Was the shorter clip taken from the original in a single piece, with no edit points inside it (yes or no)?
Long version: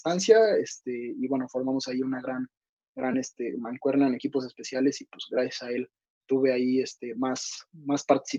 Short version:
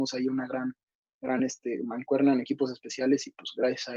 yes